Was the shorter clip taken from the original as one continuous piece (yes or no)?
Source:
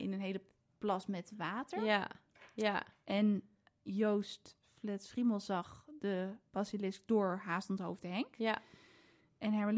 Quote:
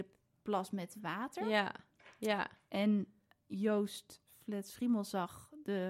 yes